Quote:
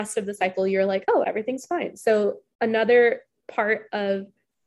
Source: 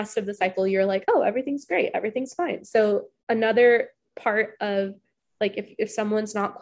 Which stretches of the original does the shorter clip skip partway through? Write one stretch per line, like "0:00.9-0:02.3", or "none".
0:01.2-0:01.9